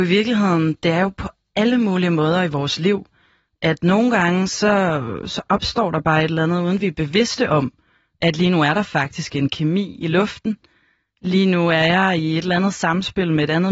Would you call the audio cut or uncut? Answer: uncut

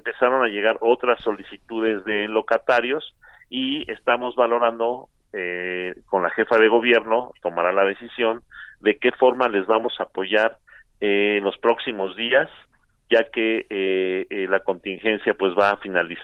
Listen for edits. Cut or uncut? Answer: uncut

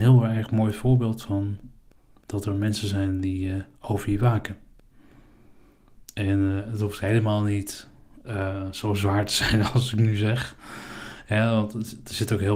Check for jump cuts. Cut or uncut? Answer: uncut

